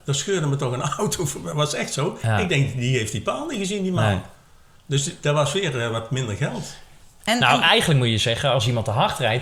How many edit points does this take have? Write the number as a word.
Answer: zero